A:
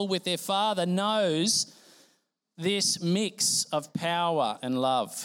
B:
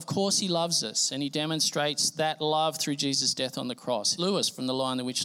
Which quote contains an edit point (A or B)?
B